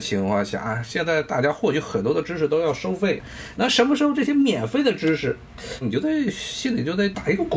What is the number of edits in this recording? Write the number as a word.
two